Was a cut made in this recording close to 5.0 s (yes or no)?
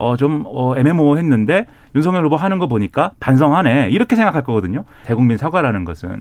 yes